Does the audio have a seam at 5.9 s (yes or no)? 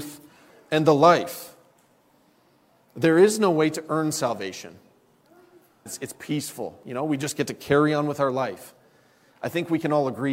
yes